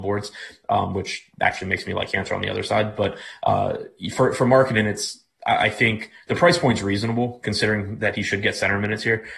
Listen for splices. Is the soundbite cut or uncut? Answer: uncut